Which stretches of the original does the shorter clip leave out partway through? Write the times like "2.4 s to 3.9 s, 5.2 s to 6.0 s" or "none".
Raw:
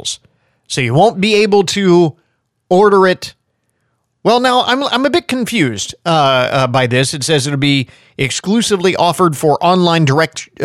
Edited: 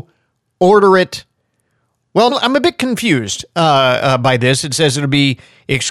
4.4 s to 4.8 s